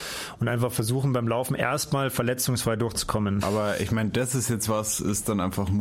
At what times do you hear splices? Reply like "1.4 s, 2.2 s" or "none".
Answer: 3.4 s, 4.7 s

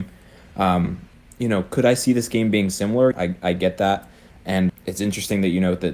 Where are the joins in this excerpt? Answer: 1.3 s, 3.1 s, 4.7 s

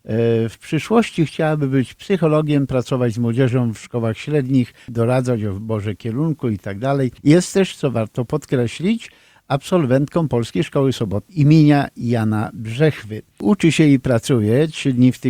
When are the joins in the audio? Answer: 7.2 s

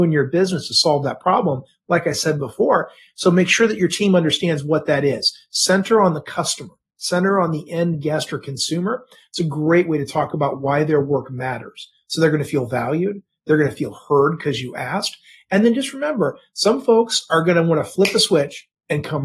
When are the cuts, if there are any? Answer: none

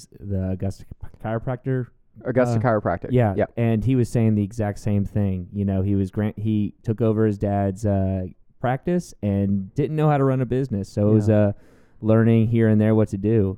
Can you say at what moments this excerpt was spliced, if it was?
none

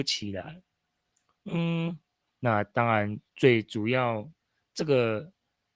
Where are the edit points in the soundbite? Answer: 2.3 s

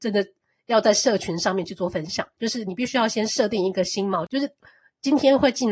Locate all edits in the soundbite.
2.4 s, 4.3 s

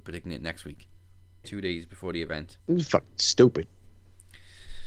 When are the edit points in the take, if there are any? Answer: 1.4 s, 2.6 s

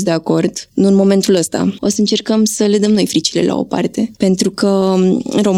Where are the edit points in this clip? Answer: 1.8 s

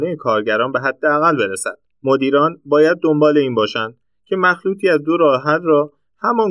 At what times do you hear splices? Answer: 2.0 s

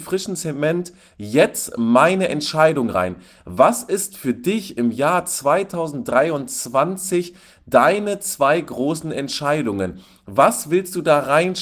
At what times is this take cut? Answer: none

